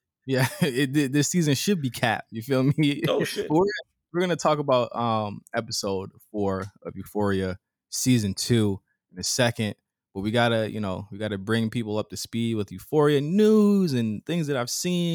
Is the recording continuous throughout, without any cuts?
yes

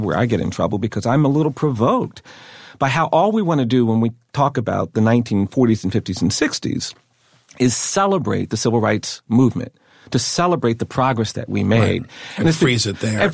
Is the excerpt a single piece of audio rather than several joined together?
yes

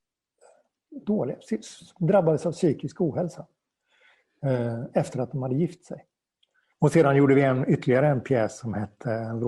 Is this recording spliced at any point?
yes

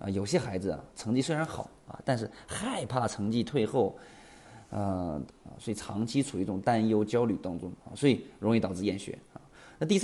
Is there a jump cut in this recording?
yes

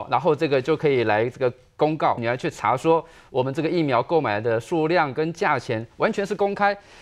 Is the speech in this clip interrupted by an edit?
yes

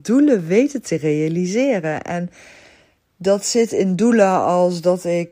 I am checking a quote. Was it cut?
no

